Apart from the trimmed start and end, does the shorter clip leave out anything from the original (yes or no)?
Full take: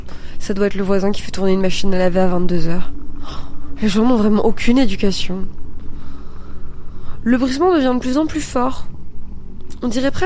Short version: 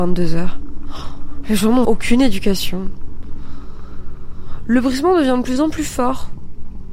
yes